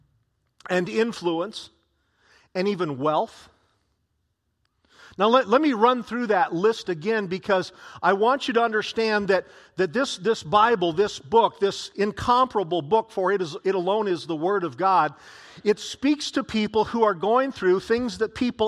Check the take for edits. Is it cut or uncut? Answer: uncut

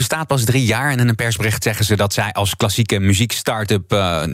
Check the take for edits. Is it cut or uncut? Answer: uncut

